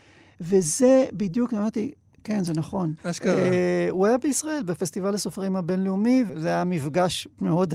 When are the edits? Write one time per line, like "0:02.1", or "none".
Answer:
0:03.0
0:06.3